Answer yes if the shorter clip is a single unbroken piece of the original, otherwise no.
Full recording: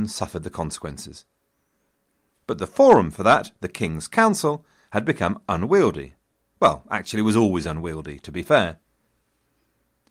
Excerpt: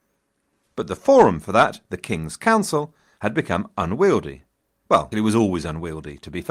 no